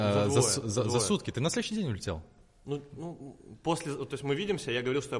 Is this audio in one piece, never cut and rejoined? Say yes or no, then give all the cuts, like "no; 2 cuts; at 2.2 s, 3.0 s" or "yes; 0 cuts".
yes; 0 cuts